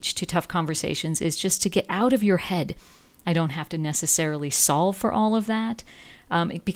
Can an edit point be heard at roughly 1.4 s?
no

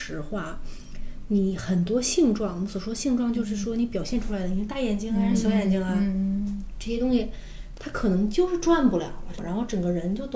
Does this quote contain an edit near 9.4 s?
yes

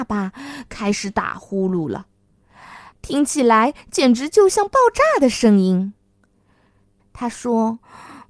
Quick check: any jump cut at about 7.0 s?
yes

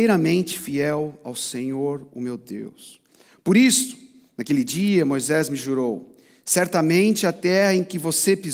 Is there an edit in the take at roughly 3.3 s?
no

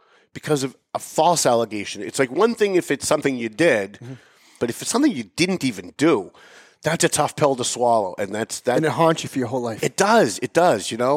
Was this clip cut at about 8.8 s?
no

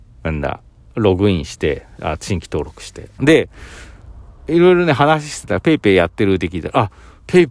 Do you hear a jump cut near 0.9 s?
no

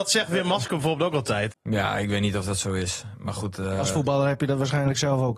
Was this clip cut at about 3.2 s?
no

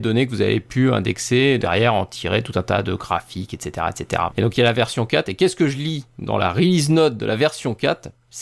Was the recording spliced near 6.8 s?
no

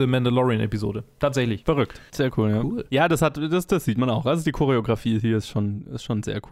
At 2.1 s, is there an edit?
yes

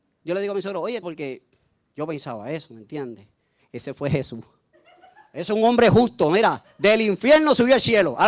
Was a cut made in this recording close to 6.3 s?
no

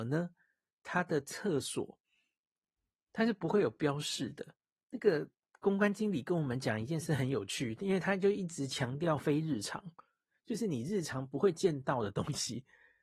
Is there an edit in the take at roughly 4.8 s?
yes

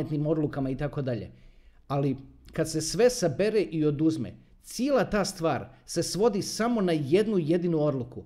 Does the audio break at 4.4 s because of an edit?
no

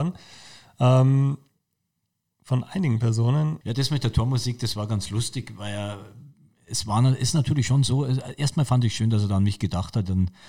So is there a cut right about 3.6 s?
yes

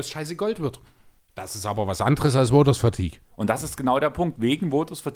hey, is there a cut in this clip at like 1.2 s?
yes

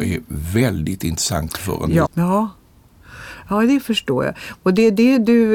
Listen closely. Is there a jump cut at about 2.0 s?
yes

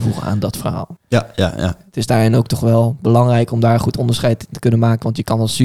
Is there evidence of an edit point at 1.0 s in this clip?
yes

